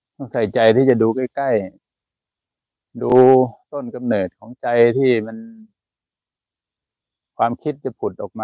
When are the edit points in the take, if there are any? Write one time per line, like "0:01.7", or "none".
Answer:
0:01.8